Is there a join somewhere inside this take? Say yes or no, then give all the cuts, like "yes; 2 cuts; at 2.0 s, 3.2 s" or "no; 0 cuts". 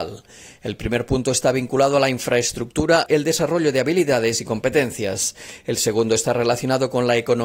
yes; 1 cut; at 3.1 s